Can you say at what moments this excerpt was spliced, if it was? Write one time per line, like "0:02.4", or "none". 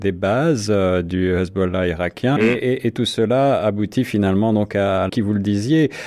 0:02.4
0:05.1

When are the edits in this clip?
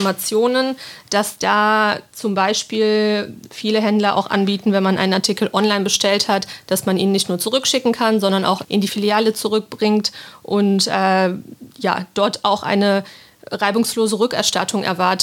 none

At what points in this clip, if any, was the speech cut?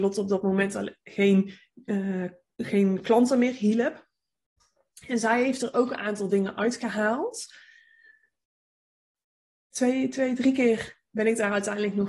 none

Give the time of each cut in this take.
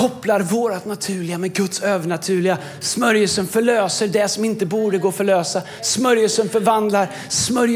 none

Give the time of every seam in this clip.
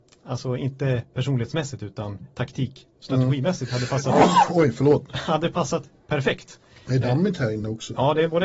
none

